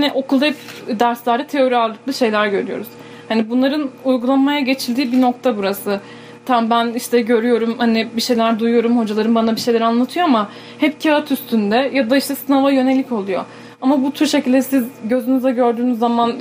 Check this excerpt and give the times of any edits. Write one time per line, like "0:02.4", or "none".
none